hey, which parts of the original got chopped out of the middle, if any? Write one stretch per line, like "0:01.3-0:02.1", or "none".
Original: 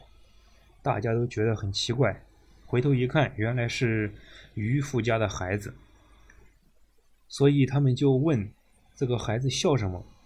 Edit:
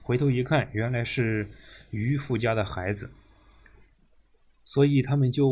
none